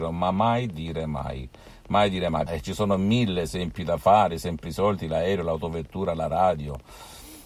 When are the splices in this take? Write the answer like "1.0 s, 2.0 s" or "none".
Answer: 2.5 s